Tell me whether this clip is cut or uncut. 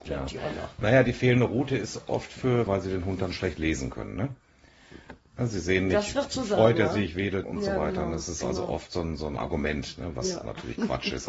cut